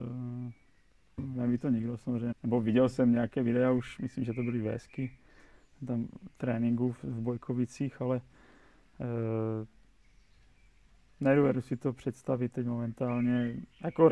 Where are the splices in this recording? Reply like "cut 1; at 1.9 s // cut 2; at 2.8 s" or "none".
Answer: cut 1; at 1.2 s // cut 2; at 2.3 s